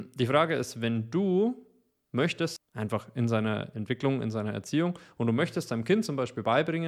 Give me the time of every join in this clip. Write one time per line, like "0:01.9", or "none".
0:02.6